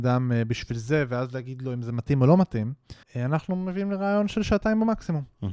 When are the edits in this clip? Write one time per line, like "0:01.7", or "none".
0:03.0